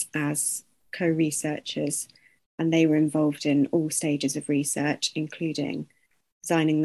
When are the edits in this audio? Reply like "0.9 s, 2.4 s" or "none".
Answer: 2.4 s